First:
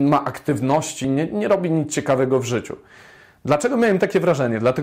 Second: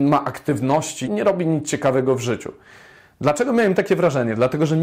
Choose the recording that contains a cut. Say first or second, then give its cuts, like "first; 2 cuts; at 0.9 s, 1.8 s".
second; 1 cut; at 1.0 s